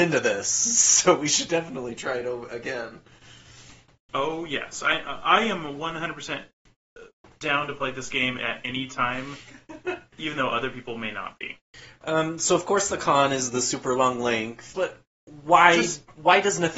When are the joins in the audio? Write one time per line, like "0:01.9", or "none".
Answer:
0:14.7